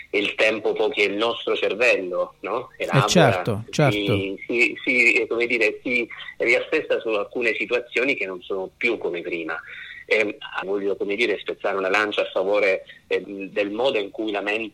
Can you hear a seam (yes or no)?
yes